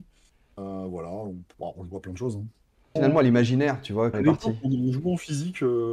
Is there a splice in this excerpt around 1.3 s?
no; 2 cuts; at 3.0 s, 4.1 s

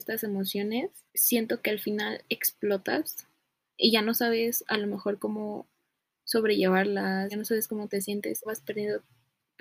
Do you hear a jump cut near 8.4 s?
yes; 3 cuts; at 1.1 s, 7.3 s, 8.4 s

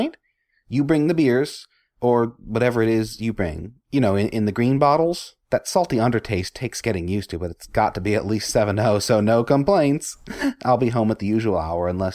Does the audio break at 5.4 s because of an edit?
yes; 1 cut; at 5.4 s

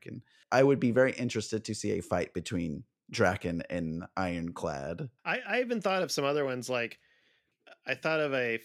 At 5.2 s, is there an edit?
yes; 1 cut; at 5.2 s

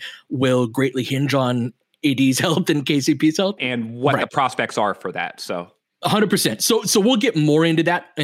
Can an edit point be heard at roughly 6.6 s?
no; 1 cut; at 3.6 s

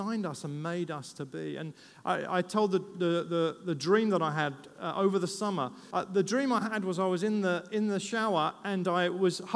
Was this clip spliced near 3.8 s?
no; 1 cut; at 5.9 s

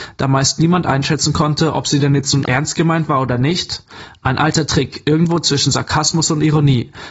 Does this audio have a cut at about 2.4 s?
yes; 1 cut; at 2.4 s

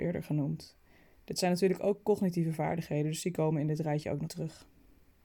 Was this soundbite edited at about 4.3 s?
yes; 1 cut; at 4.3 s

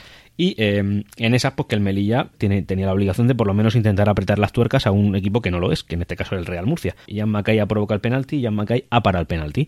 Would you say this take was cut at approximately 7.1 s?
yes; 2 cuts; at 2.3 s, 7.1 s

